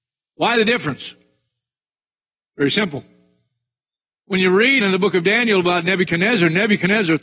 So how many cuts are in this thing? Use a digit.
1